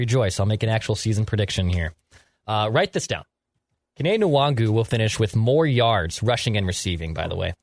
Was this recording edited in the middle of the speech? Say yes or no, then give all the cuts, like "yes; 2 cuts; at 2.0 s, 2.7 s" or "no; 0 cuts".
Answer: no; 0 cuts